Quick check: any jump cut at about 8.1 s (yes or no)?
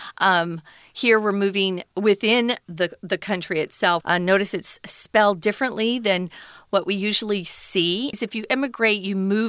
yes